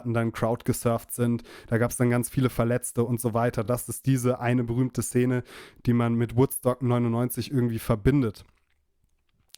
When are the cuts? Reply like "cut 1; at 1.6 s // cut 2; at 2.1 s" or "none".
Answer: none